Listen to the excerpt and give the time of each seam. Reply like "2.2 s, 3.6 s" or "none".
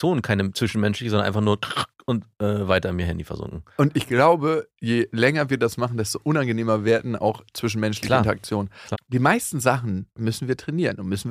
8.9 s, 10.2 s